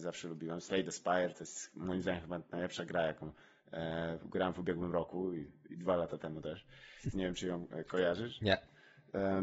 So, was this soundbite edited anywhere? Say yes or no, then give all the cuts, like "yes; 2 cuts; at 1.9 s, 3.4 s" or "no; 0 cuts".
yes; 1 cut; at 7.1 s